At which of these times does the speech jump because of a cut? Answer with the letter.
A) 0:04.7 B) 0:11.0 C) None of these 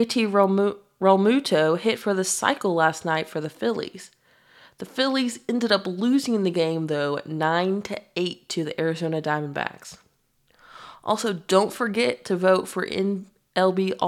C